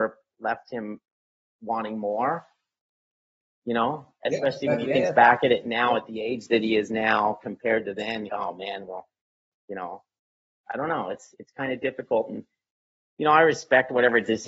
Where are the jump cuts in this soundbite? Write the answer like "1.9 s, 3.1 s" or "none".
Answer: 8.3 s, 11.3 s